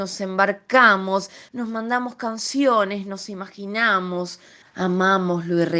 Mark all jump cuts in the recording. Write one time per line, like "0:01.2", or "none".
0:01.5
0:04.6